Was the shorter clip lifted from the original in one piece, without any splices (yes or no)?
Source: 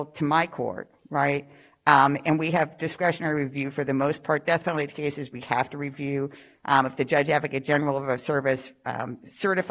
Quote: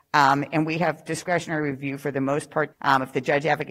no